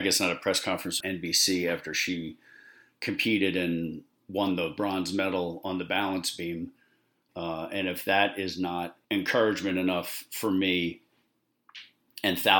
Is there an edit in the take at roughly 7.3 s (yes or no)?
yes